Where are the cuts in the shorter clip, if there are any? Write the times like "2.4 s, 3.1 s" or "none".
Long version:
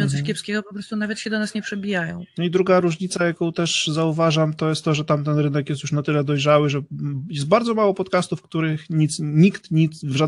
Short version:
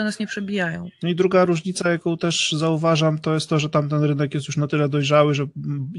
none